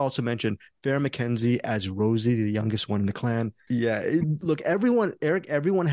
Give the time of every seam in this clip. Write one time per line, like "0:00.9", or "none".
0:03.7